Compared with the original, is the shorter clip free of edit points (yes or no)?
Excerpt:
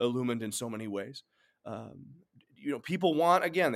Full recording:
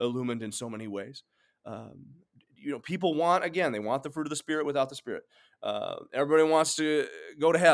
yes